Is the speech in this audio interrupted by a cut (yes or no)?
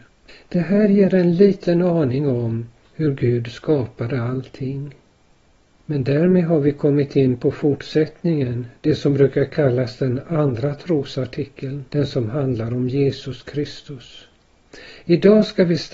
yes